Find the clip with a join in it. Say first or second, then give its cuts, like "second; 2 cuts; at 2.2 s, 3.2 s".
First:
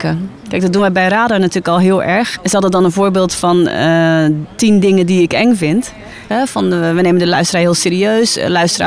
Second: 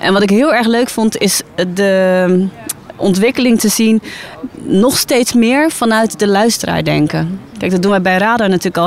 first; 2 cuts; at 2.4 s, 6.3 s